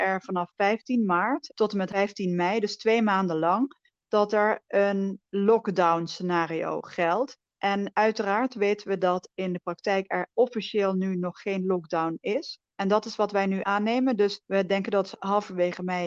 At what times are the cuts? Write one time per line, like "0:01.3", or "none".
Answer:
0:12.7